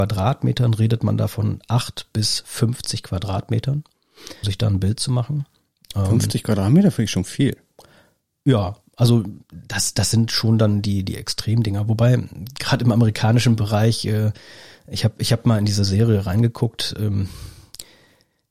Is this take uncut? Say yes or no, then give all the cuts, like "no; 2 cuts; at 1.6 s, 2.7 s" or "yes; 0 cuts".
no; 1 cut; at 4.4 s